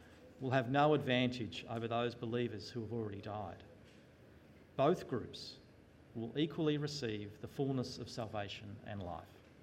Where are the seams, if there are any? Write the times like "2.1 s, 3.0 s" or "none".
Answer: none